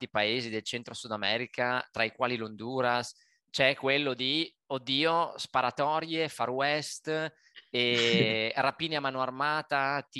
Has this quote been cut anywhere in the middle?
no; 0 cuts

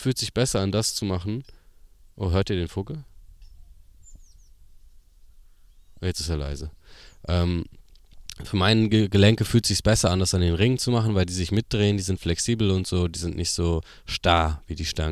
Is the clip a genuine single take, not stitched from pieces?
yes; 0 cuts

